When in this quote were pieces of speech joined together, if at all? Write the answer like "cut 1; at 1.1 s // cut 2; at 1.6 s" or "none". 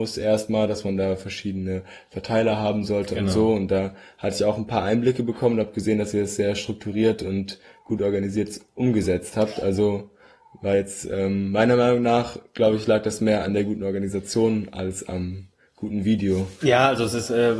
none